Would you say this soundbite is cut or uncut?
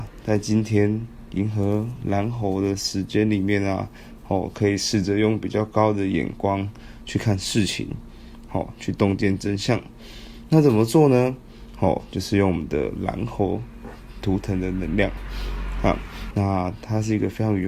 cut